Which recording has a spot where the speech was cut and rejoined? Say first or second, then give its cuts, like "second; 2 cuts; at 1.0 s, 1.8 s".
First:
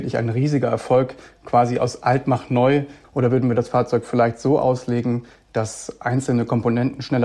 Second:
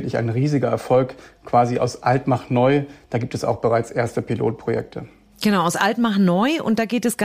first; 1 cut; at 3.0 s